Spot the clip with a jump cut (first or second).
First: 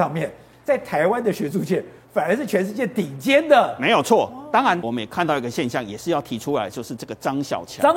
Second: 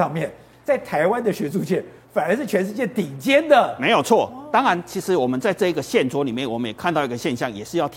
first